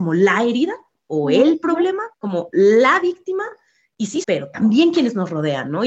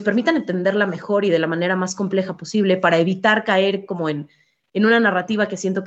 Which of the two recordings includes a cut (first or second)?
first